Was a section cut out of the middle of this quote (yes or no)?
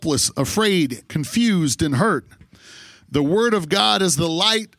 yes